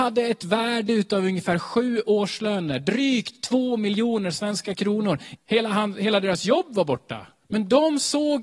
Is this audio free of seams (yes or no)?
no